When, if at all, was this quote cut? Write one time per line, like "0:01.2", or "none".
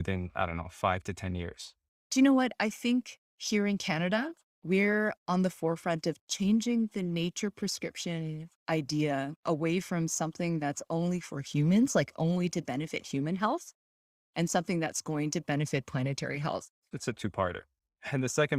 0:16.9